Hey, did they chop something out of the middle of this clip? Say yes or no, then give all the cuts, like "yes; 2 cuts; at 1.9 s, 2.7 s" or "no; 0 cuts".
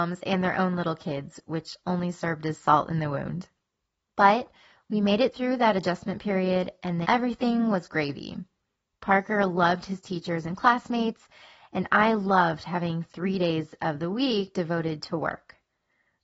yes; 1 cut; at 7.0 s